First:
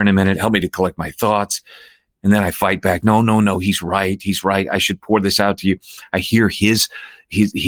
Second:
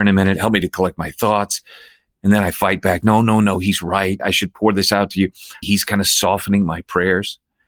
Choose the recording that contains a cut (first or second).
second